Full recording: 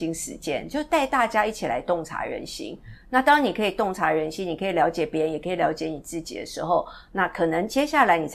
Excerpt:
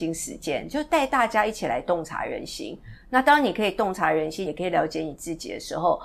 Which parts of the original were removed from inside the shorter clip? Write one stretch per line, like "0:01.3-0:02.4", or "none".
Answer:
0:04.5-0:05.3